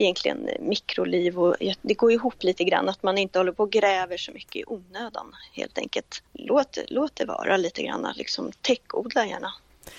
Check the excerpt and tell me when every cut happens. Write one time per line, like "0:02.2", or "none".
0:06.3